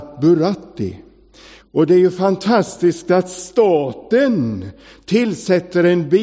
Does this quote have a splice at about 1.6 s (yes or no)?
yes